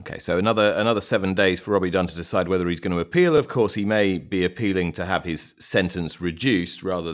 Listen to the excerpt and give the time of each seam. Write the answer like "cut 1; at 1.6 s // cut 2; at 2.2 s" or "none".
none